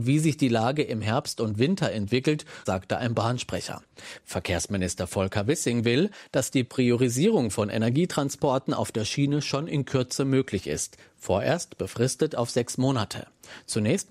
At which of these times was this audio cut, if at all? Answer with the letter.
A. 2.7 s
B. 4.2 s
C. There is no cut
A